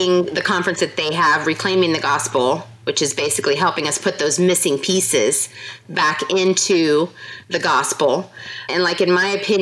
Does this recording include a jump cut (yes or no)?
yes